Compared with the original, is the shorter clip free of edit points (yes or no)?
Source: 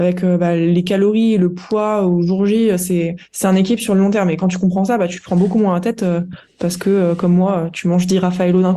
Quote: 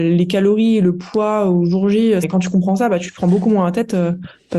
no